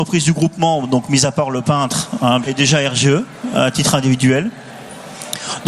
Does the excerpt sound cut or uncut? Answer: cut